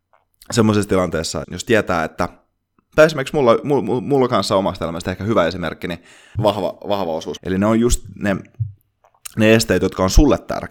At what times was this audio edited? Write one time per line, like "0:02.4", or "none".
0:01.4
0:06.4
0:07.4

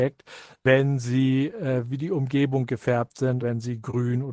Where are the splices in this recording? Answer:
0:03.4

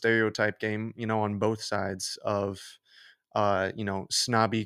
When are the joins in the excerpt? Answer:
none

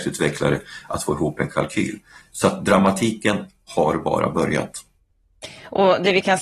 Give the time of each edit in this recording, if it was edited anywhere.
none

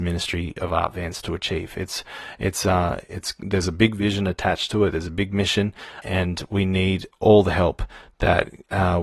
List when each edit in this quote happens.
0:06.0

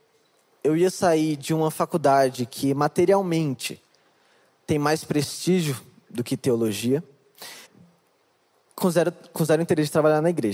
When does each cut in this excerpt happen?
0:07.7

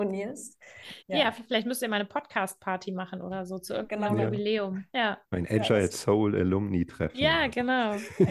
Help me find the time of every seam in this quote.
0:01.0

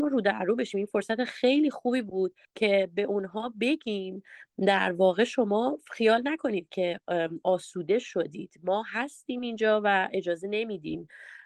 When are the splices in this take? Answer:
0:02.4

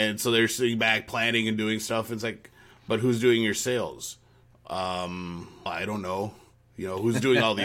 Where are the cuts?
0:05.7

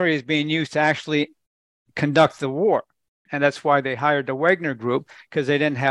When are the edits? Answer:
0:03.3

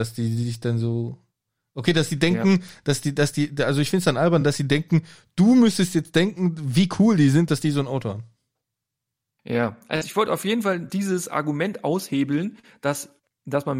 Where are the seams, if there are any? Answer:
none

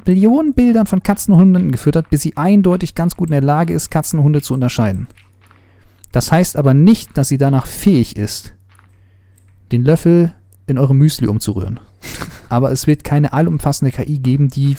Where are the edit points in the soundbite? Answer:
0:12.5

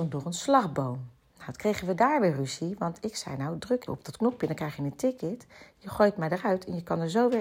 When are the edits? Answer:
0:03.9

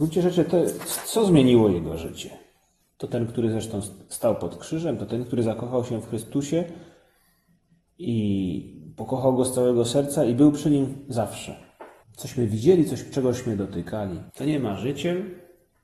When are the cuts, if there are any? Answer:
0:02.9
0:12.0
0:14.3

